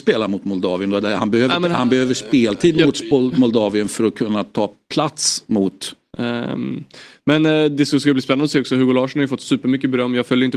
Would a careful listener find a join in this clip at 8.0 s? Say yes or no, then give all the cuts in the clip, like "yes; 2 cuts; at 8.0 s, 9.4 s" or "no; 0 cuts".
no; 1 cut; at 6.1 s